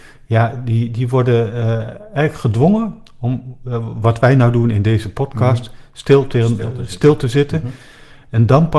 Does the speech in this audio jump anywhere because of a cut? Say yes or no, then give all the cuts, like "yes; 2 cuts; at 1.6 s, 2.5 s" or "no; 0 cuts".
no; 0 cuts